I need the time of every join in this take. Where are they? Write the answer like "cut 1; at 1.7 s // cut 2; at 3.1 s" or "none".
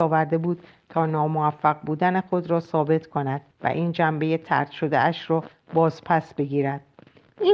cut 1; at 3.5 s